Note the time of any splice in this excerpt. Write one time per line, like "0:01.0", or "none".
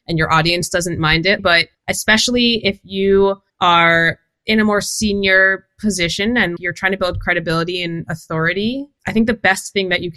0:01.4
0:06.6